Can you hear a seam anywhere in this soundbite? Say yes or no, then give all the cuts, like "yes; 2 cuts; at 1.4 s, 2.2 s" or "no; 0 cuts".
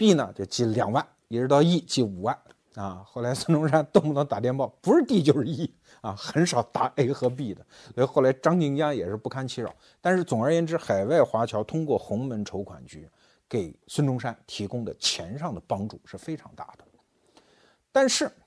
yes; 1 cut; at 13.8 s